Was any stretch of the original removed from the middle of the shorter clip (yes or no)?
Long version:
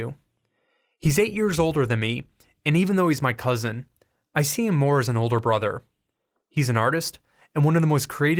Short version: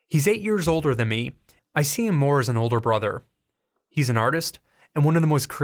yes